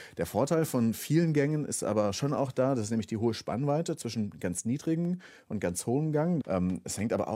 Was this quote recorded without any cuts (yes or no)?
no